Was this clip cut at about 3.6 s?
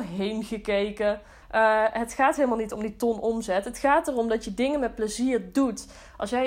no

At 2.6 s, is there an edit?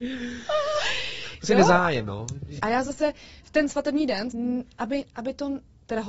yes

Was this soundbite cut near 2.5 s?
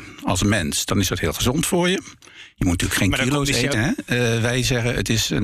no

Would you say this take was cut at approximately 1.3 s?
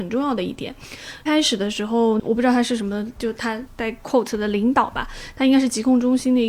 yes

